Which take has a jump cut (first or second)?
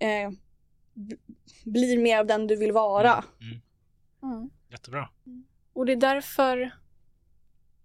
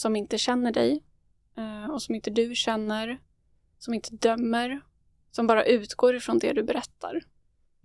second